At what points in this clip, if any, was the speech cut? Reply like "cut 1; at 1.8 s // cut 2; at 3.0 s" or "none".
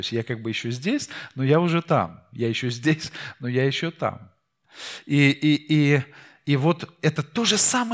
none

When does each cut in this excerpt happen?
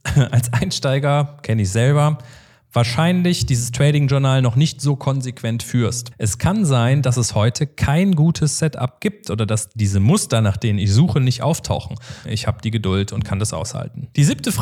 cut 1; at 6.1 s // cut 2; at 12.2 s

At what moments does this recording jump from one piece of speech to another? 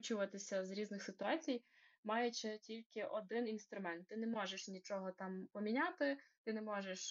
none

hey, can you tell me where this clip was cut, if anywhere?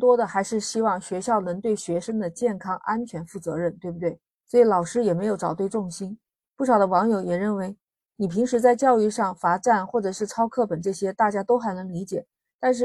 cut 1; at 4.3 s

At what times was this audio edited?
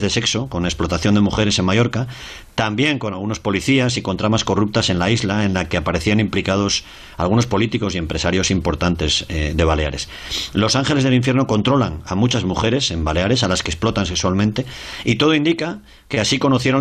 none

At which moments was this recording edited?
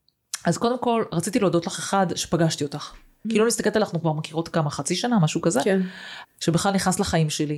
cut 1; at 3.2 s // cut 2; at 6.2 s

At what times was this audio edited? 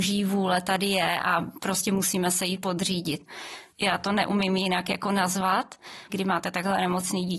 cut 1; at 3.7 s // cut 2; at 6.1 s

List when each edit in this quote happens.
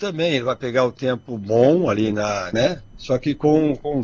cut 1; at 2.5 s

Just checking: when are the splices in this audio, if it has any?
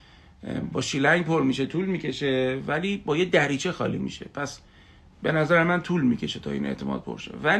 none

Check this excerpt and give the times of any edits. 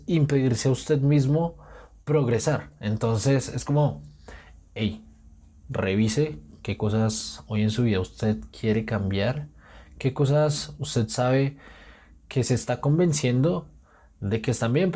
none

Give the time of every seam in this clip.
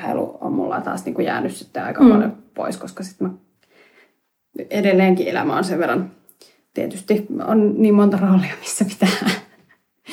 none

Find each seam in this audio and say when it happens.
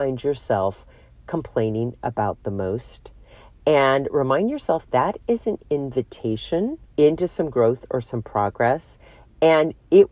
cut 1; at 4.9 s // cut 2; at 6.9 s

